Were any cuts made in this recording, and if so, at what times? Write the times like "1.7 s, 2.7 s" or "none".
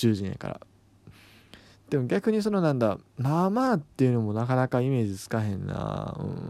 none